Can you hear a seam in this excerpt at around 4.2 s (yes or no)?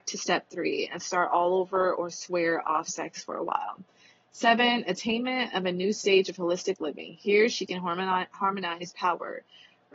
no